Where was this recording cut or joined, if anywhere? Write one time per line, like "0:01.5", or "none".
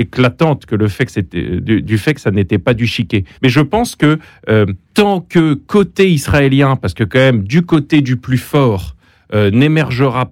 0:03.3
0:04.8